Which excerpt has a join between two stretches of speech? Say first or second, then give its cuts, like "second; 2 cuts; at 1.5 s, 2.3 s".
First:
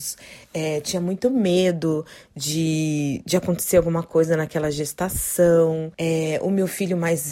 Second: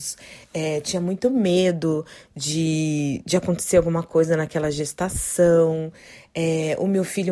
first; 1 cut; at 5.9 s